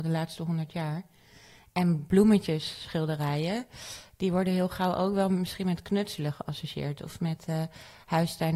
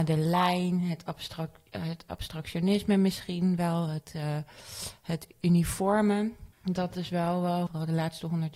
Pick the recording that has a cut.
second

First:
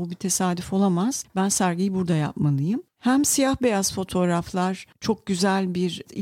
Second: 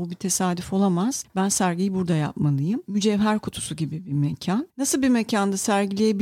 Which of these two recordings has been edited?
second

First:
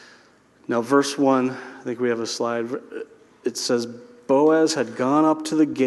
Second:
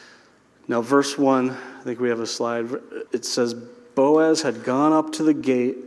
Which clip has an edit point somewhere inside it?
second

